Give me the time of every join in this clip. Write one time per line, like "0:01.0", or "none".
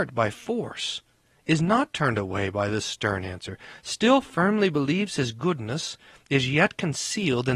none